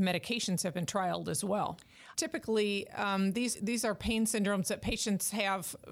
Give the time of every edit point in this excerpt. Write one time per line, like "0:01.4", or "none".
0:02.1
0:03.5